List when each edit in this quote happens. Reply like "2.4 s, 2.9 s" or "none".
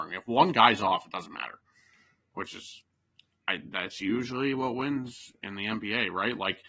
none